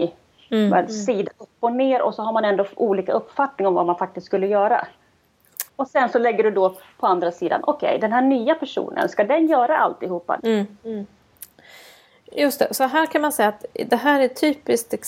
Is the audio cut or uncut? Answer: cut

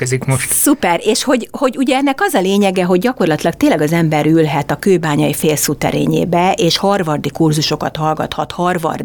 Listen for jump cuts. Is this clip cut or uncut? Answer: uncut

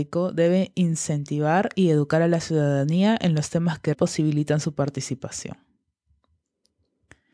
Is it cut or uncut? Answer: cut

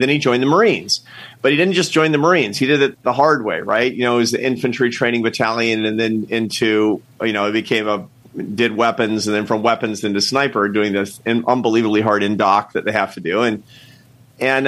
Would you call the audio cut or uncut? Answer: uncut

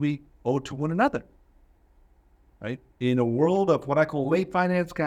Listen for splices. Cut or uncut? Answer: uncut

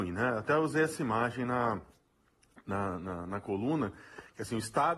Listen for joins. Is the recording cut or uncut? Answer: uncut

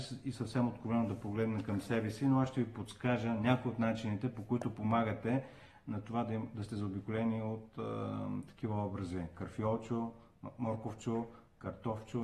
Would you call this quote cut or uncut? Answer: uncut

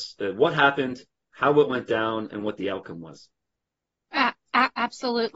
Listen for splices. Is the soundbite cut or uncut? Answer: uncut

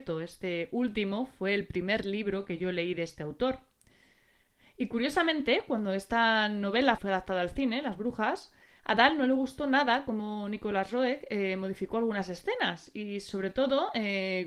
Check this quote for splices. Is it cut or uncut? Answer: cut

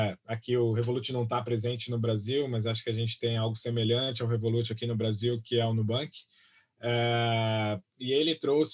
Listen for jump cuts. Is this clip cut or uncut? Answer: uncut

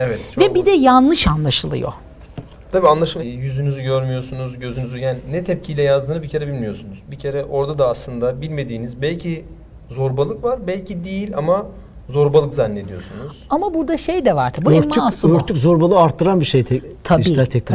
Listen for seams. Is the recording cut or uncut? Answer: cut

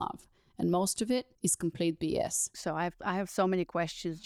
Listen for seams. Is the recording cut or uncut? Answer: cut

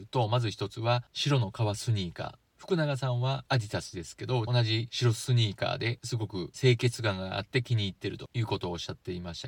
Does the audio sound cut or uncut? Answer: cut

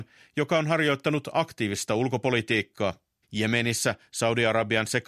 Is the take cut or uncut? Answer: cut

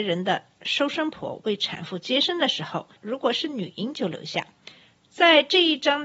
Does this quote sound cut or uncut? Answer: cut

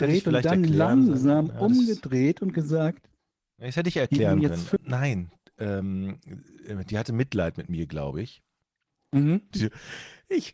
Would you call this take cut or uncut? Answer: cut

